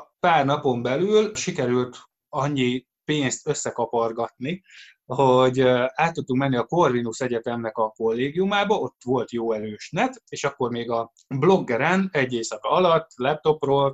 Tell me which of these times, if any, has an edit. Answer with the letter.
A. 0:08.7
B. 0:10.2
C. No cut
C